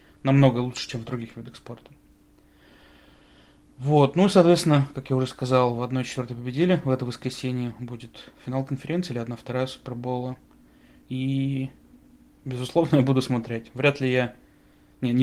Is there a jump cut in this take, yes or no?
no